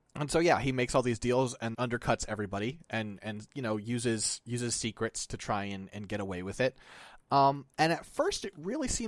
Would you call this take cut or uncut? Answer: cut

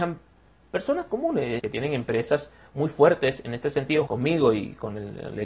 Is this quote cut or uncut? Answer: cut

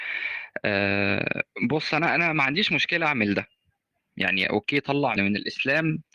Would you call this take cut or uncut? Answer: cut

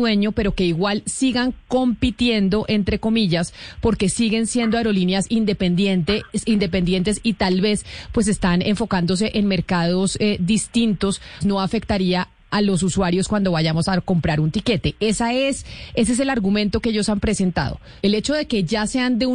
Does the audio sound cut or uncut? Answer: cut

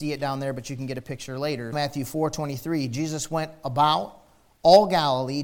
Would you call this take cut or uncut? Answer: cut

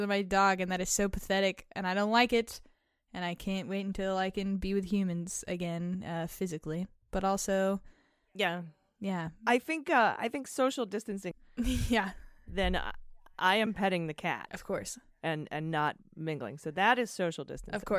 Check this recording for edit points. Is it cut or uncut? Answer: cut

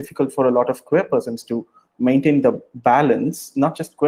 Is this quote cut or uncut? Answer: uncut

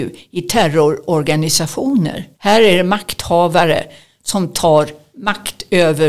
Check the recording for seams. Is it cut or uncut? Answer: cut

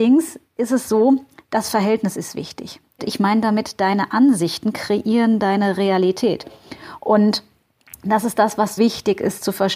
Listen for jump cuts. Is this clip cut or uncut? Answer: cut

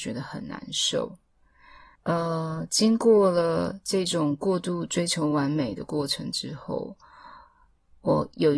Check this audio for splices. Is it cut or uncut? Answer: cut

